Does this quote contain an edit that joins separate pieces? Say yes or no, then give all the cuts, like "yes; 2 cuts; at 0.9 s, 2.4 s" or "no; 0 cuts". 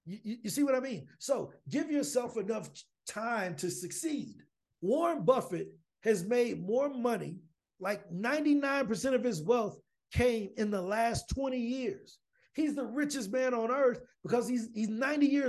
yes; 1 cut; at 4.7 s